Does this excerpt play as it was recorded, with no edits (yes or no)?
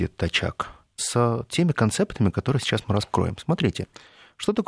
no